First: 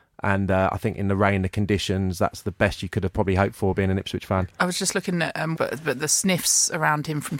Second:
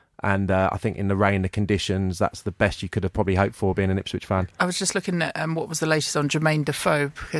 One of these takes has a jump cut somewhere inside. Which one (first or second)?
first